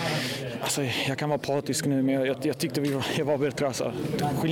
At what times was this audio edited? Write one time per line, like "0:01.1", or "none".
none